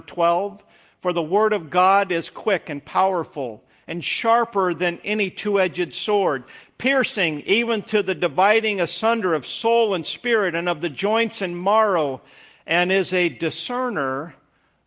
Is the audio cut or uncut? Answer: uncut